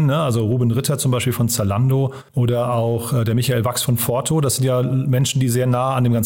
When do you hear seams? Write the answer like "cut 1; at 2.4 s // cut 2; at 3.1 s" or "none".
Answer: cut 1; at 2.3 s

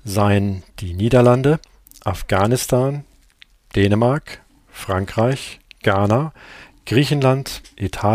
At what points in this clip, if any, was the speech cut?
none

